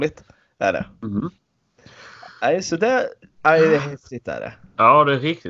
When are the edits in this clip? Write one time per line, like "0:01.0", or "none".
none